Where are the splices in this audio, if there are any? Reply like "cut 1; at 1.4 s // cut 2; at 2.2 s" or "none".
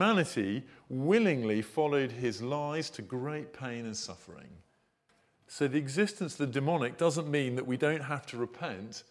none

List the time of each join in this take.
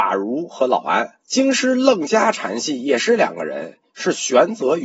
cut 1; at 1.2 s

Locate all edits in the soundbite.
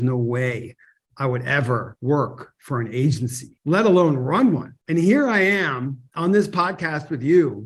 cut 1; at 3.6 s

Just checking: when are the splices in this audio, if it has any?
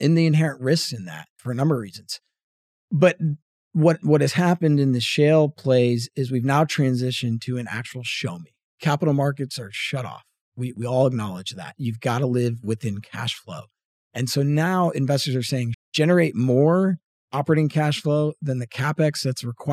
cut 1; at 15.7 s

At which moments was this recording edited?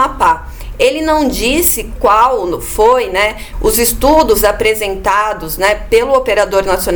cut 1; at 3.5 s

